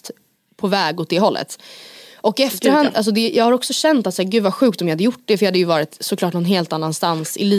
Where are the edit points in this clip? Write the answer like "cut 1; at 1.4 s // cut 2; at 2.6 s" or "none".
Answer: none